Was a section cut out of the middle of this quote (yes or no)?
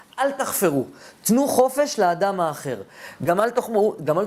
no